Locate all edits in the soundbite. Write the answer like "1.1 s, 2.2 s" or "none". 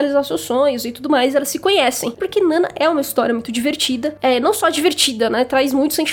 2.2 s